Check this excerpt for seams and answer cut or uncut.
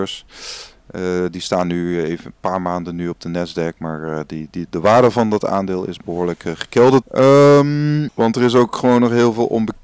cut